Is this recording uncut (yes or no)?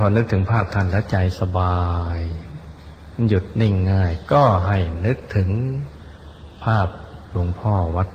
yes